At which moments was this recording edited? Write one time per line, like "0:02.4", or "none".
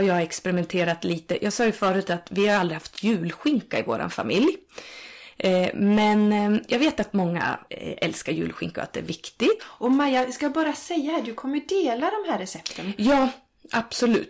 0:07.7
0:09.6